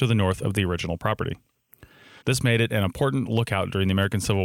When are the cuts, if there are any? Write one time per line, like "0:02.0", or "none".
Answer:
0:02.2